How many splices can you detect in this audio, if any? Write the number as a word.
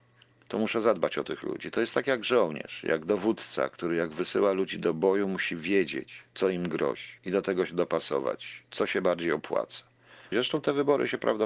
two